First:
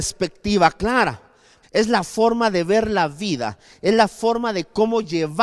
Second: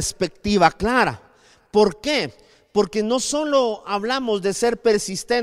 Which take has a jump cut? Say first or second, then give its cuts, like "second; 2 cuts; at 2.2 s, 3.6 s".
first; 1 cut; at 1.6 s